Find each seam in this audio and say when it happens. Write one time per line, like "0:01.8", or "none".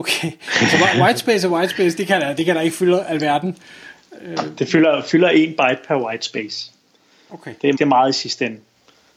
0:02.0
0:07.8